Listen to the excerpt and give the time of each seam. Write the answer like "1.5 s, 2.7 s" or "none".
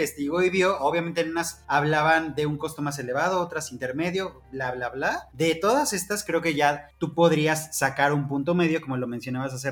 none